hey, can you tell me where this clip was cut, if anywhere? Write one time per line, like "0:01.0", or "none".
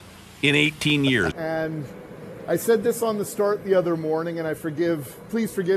0:01.3